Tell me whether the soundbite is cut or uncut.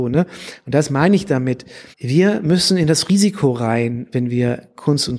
cut